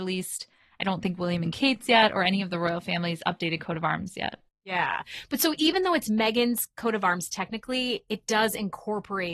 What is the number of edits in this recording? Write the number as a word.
zero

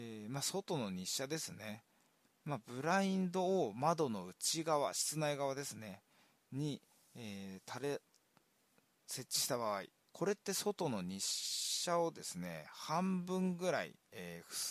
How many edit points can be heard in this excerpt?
one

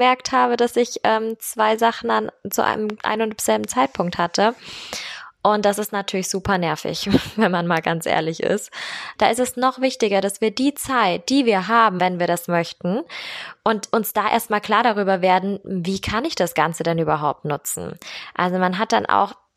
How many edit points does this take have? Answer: two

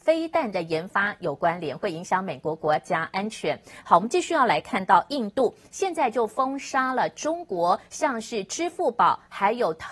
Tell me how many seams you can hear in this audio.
one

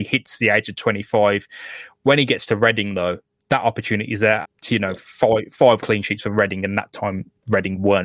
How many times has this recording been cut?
two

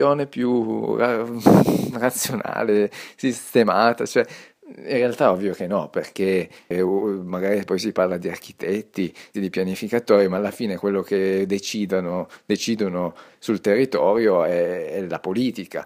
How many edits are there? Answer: one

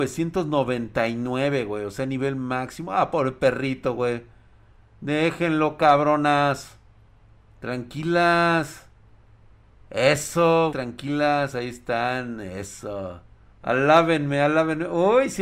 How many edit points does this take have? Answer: two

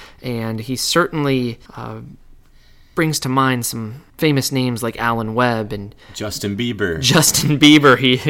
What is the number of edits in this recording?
two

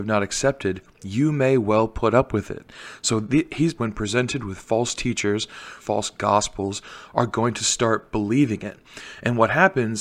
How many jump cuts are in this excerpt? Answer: two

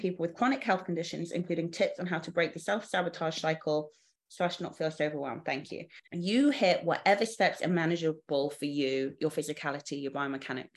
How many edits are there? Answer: one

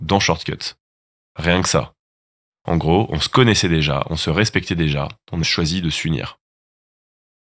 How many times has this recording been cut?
one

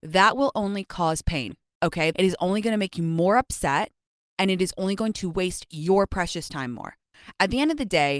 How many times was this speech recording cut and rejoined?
one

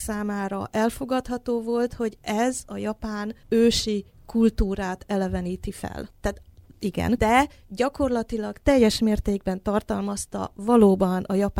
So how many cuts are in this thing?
three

